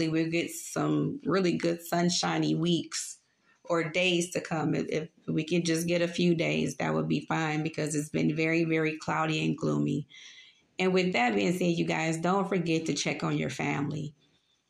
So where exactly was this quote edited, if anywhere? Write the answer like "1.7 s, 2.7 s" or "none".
none

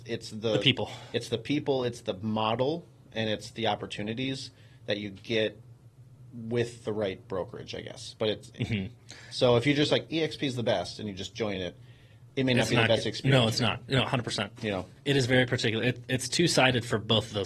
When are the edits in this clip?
none

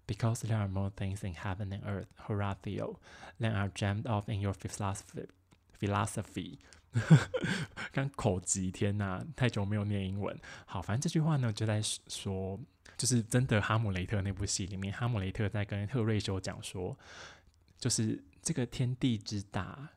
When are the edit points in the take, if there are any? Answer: 12.9 s

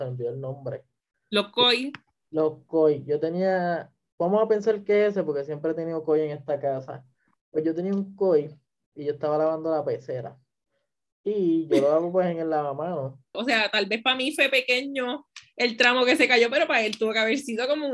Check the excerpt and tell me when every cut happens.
13.3 s

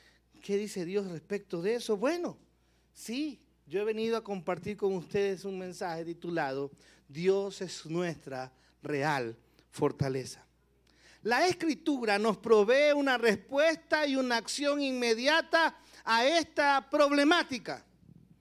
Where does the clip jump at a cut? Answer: none

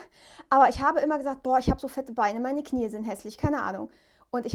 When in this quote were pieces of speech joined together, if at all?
none

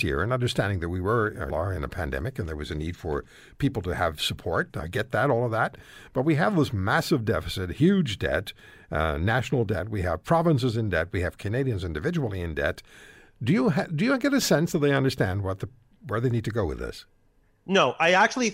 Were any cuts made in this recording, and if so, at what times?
1.5 s

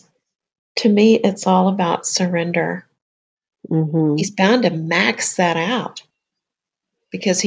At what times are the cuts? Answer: 3.5 s

